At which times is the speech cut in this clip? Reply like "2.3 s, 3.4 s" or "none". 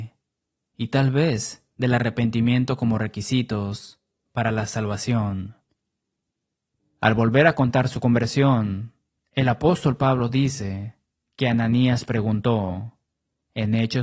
6.8 s